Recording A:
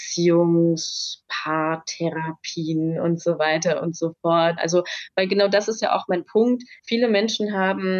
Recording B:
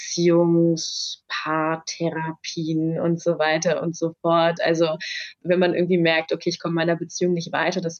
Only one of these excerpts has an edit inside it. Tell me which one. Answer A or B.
A